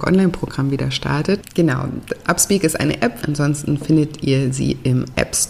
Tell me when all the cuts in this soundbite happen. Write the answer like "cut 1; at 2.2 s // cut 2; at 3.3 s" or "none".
cut 1; at 1.4 s // cut 2; at 3.2 s